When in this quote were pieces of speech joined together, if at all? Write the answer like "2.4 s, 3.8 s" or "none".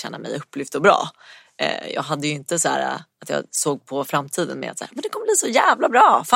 3.1 s